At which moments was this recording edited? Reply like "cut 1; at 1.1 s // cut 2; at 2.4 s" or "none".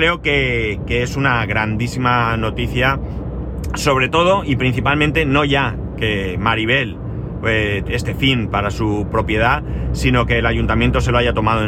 cut 1; at 7.8 s